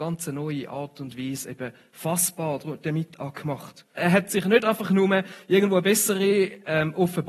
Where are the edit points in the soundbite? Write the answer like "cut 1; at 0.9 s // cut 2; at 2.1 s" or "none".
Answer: cut 1; at 4.0 s